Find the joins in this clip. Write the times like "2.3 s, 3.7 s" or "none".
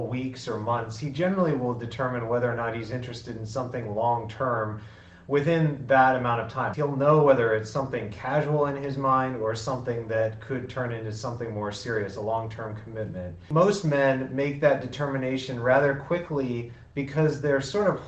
6.7 s